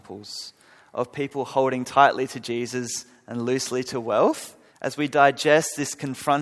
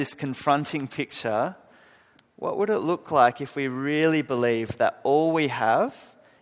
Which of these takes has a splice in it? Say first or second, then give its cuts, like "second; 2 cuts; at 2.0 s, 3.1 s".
first; 1 cut; at 4.7 s